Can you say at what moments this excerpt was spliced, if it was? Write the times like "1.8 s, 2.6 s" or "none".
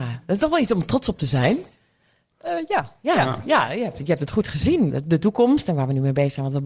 4.9 s